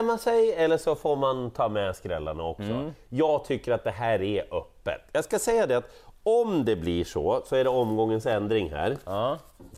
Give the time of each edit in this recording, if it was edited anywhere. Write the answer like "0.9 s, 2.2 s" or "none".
none